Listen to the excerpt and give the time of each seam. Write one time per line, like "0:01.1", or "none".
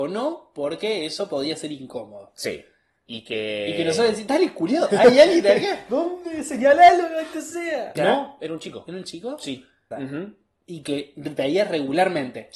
0:08.0
0:09.9